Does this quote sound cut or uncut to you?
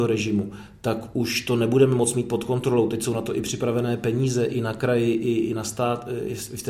uncut